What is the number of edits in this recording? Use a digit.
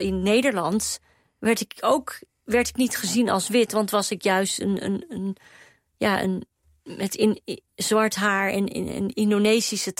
0